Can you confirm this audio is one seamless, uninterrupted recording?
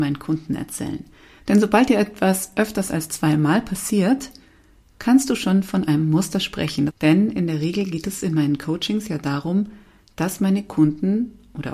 no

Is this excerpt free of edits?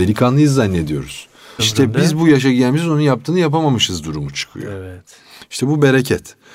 no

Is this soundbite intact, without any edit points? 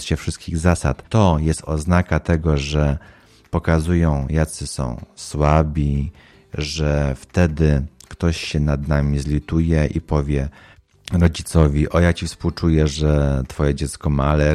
yes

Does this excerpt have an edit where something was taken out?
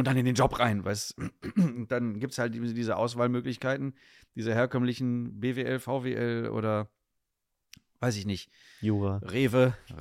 no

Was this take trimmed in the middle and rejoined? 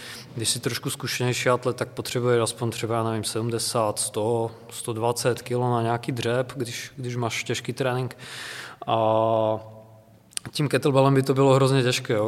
no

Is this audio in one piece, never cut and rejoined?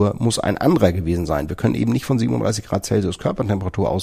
yes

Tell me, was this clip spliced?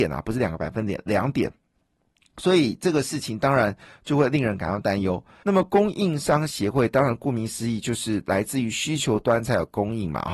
yes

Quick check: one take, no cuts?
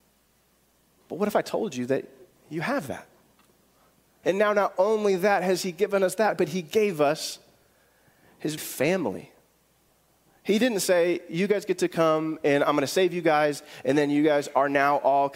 no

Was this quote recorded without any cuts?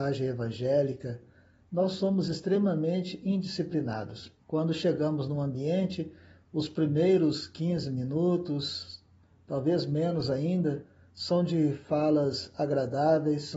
no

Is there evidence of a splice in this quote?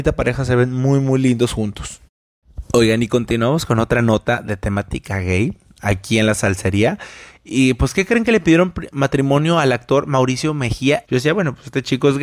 yes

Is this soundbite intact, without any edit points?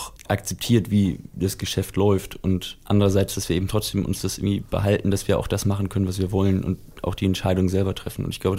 yes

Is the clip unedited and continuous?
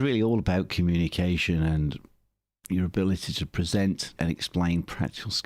no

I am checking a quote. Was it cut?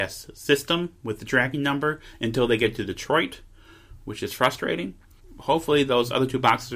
no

